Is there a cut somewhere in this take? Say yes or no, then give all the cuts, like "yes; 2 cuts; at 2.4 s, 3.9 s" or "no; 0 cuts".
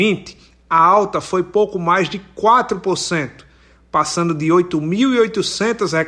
no; 0 cuts